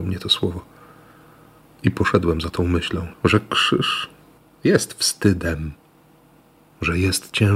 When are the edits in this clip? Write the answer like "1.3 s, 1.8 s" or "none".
3.1 s